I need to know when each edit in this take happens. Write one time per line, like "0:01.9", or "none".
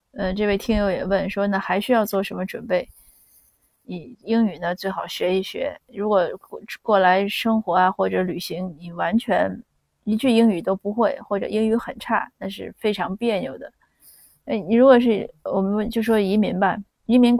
0:03.8